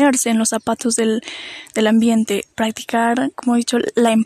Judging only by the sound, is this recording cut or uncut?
cut